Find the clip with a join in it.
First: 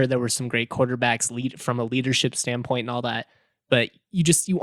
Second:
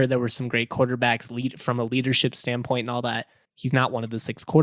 second; 1 cut; at 3.4 s

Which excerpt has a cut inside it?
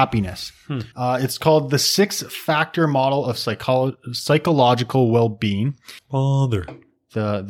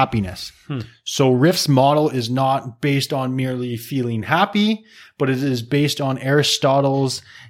first; 2 cuts; at 0.9 s, 6.0 s

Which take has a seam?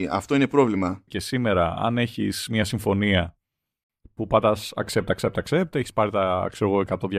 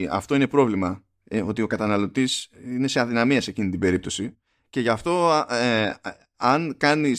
first; 1 cut; at 1.1 s

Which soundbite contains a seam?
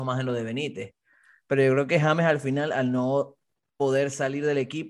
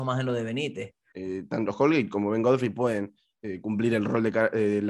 second; 1 cut; at 1.1 s

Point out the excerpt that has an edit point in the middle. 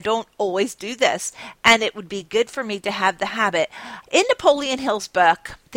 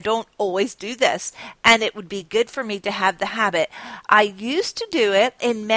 first; 1 cut; at 4.0 s

